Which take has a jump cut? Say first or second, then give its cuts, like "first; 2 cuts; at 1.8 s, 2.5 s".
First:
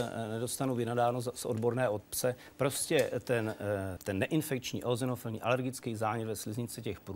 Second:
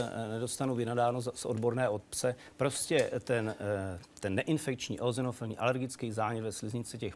first; 1 cut; at 4.0 s